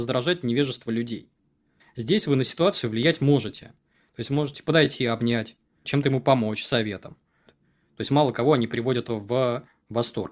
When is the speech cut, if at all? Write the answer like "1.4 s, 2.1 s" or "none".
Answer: 1.8 s, 5.8 s, 7.5 s